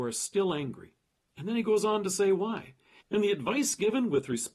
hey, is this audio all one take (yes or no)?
no